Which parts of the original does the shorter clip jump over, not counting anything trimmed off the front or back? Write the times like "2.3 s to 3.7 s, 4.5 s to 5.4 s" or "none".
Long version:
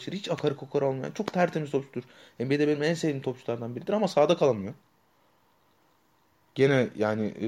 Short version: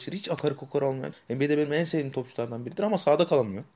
1.1 s to 2.2 s